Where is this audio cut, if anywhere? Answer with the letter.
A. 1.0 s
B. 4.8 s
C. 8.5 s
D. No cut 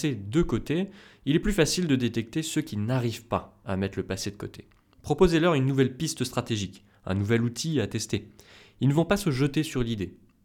B